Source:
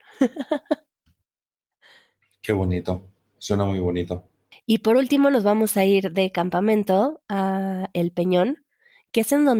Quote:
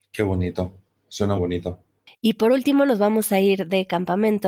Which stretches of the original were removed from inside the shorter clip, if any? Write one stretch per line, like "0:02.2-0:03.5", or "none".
0:03.7-0:03.8